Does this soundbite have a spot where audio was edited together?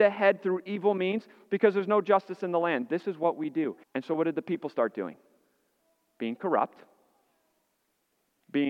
yes; 1 cut; at 3.8 s

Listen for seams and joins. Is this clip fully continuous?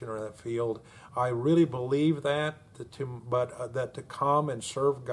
no; 1 cut; at 1.1 s

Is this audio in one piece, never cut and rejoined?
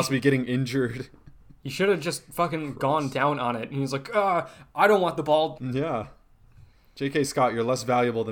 no; 1 cut; at 5.6 s

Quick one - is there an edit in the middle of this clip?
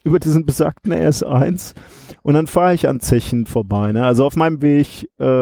no; 0 cuts

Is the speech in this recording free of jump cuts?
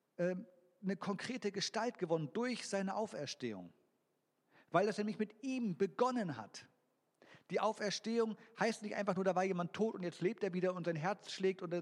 yes; 0 cuts

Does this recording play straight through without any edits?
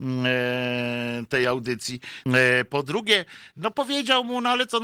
no; 1 cut; at 2.3 s

